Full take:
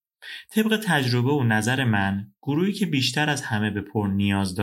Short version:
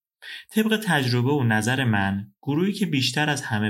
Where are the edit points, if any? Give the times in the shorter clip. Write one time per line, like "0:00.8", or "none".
none